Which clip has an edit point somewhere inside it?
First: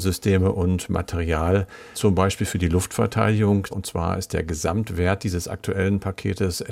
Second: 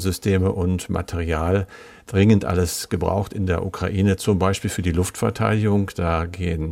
first; 2 cuts; at 1.9 s, 3.7 s

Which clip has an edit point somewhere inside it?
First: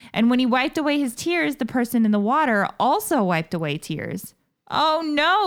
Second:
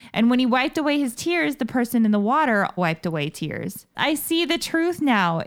second; 2 cuts; at 2.8 s, 3.9 s

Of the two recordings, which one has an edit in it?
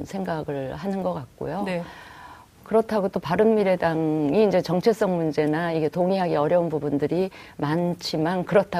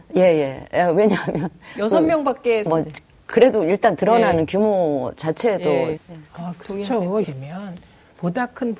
second; 3 cuts; at 2.7 s, 6.0 s, 7.2 s

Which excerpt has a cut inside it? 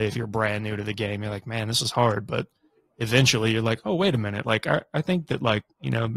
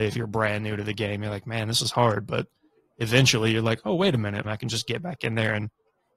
second; 1 cut; at 4.4 s

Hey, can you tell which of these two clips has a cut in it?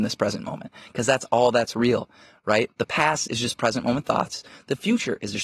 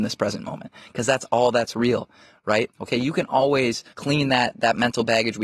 second; 2 cuts; at 2.7 s, 3.9 s

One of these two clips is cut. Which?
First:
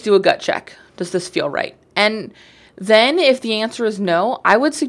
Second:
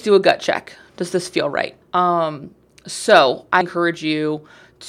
second; 2 cuts; at 1.8 s, 3.6 s

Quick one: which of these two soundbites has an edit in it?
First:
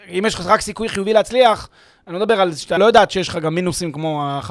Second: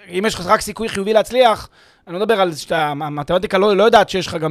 first; 1 cut; at 2.8 s

